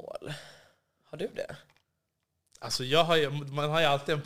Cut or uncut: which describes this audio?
uncut